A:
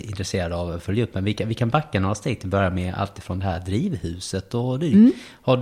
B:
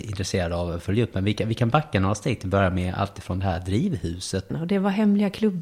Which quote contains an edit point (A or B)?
B